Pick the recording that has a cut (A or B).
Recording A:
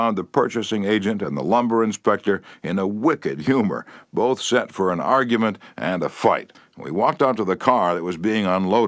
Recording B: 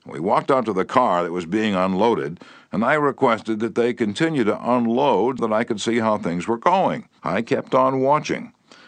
B